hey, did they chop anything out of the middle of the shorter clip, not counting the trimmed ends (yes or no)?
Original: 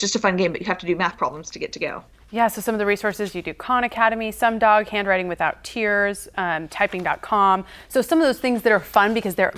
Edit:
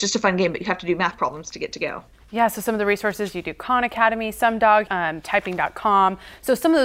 yes